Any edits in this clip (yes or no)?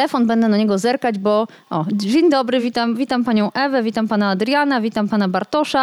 no